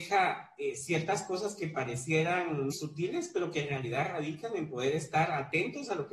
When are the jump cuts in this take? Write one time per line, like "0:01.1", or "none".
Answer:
0:02.7